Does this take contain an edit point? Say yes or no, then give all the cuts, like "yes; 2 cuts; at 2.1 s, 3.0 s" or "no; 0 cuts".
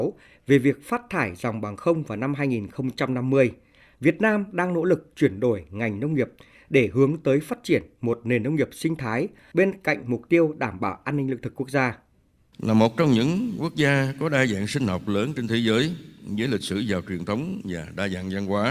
no; 0 cuts